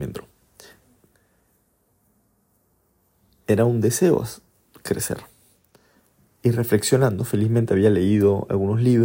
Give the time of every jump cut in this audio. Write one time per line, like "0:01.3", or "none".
none

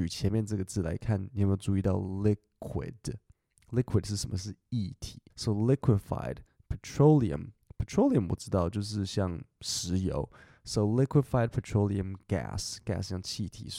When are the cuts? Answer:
0:05.3

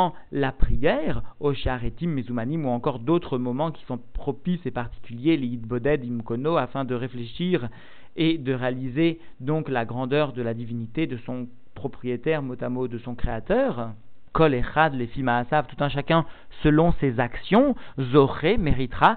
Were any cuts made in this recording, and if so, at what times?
none

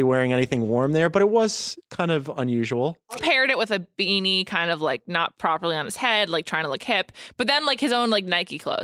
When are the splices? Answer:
0:03.2

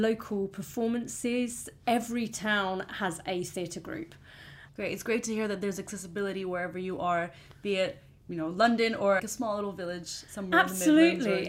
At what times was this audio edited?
0:04.7
0:09.2

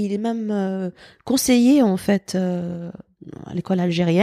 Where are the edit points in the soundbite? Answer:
none

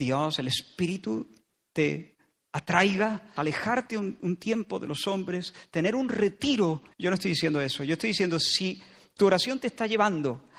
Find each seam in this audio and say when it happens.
0:03.4
0:06.9

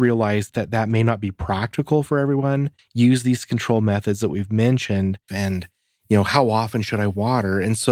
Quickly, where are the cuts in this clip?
0:02.8
0:05.3

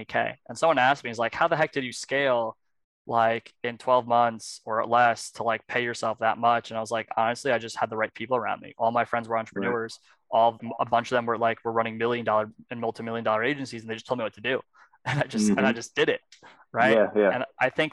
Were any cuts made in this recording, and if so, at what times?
0:10.6

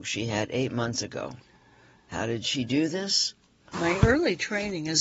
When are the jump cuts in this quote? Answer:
0:03.7

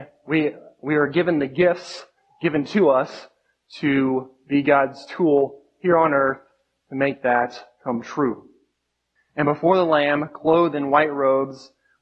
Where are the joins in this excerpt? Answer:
0:09.2

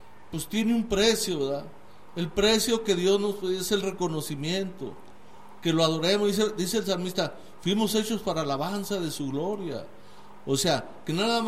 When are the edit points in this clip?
none

